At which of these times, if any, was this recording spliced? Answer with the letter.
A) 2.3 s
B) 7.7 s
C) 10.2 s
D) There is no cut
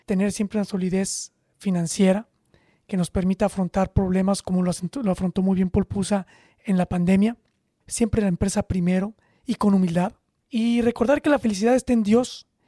D